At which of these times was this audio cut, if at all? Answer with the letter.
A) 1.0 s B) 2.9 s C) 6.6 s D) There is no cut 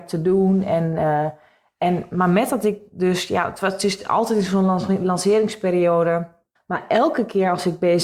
C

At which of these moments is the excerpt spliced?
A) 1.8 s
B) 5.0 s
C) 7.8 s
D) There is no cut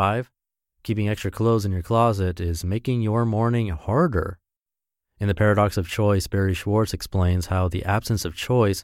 D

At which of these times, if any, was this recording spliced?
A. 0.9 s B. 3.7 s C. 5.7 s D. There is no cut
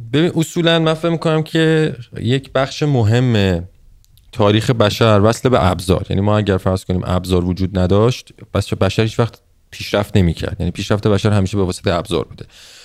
D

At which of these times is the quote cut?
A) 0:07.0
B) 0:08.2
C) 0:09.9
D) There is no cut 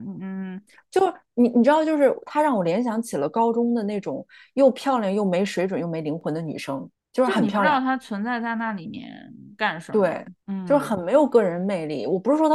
D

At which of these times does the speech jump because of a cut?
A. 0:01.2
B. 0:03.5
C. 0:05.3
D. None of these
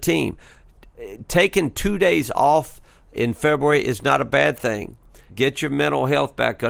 C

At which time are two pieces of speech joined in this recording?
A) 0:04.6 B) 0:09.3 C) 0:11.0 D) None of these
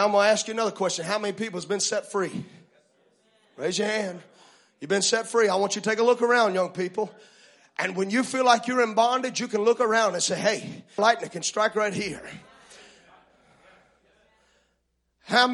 C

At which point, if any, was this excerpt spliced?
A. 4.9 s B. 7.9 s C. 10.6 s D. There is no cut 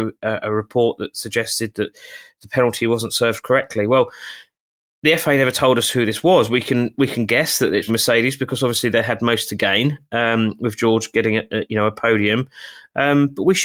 B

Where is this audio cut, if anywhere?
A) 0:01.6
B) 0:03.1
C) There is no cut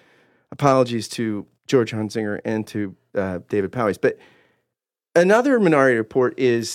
A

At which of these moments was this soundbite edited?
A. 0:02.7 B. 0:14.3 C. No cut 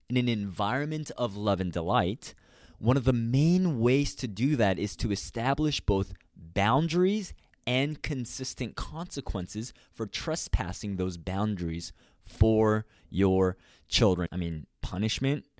B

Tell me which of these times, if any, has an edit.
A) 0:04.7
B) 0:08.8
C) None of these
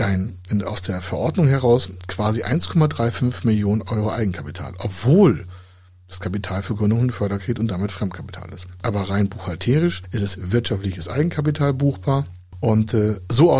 C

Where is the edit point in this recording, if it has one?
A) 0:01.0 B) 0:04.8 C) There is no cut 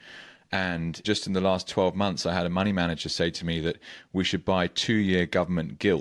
A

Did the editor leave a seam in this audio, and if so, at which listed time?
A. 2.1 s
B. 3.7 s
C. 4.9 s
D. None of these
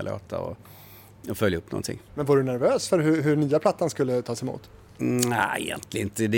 A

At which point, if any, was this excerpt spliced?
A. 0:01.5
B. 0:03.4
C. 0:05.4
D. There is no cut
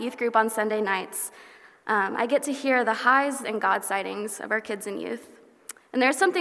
B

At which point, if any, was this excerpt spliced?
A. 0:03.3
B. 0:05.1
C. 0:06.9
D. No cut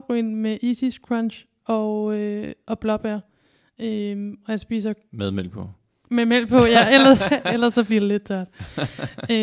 D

